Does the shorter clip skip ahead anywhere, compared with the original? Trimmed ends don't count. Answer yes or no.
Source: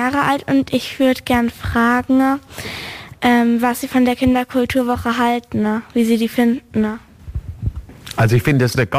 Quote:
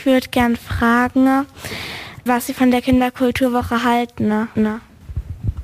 yes